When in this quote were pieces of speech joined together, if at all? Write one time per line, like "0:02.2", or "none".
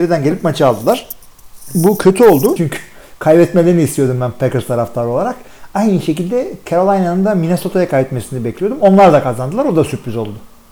0:02.6